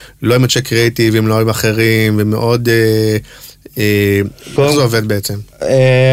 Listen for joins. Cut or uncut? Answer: cut